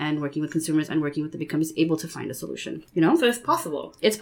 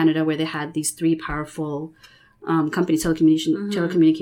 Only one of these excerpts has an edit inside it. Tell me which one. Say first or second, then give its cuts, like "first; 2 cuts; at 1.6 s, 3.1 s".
first; 1 cut; at 2.9 s